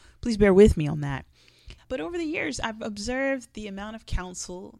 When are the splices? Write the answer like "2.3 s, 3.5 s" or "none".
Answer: 1.8 s